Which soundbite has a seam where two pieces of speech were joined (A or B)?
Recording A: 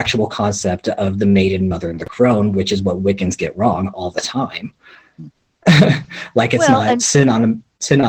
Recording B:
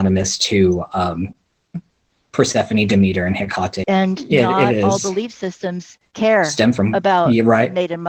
B